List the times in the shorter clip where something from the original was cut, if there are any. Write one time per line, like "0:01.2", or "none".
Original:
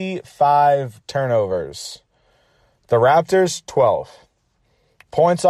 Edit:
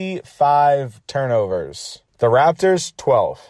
0:02.1